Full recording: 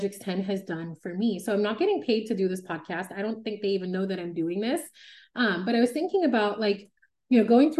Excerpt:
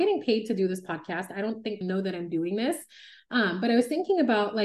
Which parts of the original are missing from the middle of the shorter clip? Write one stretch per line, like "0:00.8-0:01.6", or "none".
0:03.6-0:03.9